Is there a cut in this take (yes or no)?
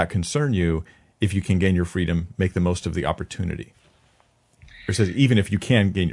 no